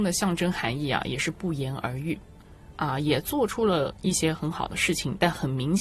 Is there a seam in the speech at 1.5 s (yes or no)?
no